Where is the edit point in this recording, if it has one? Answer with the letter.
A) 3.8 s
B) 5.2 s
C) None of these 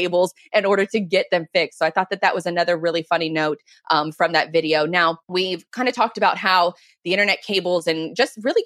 B